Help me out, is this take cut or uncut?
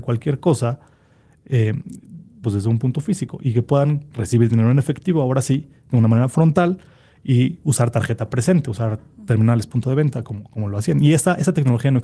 cut